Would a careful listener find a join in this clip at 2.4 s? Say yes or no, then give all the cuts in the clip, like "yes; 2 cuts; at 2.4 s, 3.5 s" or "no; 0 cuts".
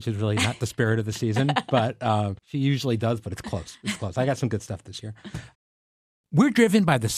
yes; 1 cut; at 2.4 s